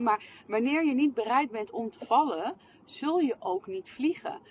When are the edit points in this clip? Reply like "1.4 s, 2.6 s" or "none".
none